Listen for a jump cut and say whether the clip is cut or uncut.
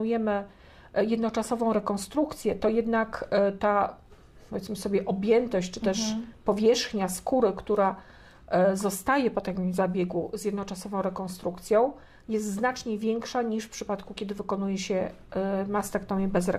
uncut